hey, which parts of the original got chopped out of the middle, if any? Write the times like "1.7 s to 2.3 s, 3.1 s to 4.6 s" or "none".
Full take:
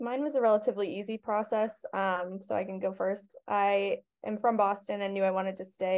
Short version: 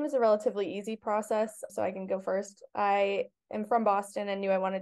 1.9 s to 2.4 s